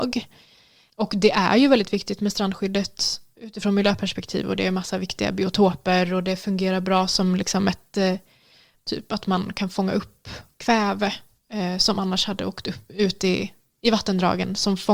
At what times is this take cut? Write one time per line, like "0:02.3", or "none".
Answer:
0:08.7